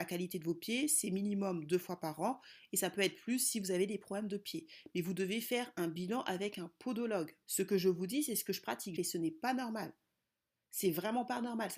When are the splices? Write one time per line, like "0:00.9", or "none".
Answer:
0:07.4
0:09.0